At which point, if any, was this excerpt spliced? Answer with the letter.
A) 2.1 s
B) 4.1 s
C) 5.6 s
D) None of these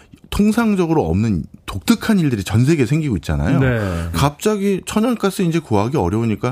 B